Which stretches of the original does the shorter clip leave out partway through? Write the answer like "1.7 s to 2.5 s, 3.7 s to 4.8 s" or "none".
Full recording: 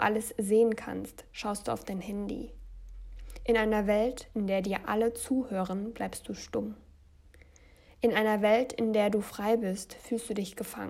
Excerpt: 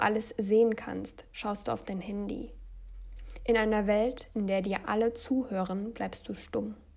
none